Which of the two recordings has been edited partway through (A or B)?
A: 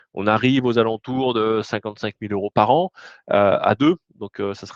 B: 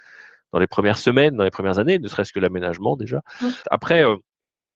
B